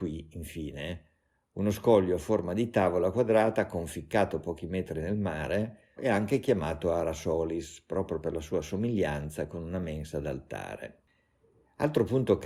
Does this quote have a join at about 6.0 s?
yes; 1 cut; at 6.0 s

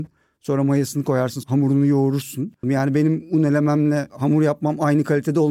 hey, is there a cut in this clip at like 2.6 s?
yes; 2 cuts; at 1.4 s, 2.6 s

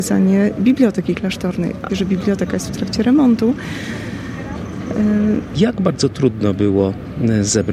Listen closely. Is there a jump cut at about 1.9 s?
yes; 2 cuts; at 1.9 s, 5.5 s

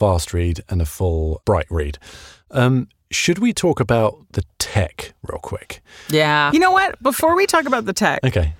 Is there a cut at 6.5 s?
yes; 1 cut; at 6.5 s

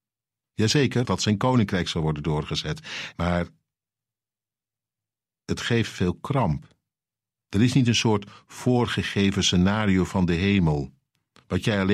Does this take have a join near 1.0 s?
yes; 3 cuts; at 1.0 s, 3.1 s, 7.4 s

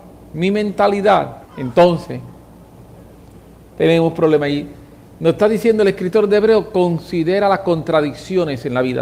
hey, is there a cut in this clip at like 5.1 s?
no; 1 cut; at 1.5 s

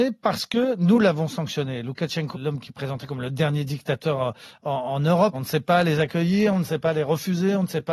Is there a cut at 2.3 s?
yes; 2 cuts; at 2.3 s, 5.3 s

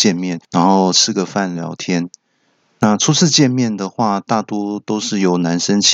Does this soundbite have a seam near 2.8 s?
no; 1 cut; at 1.5 s

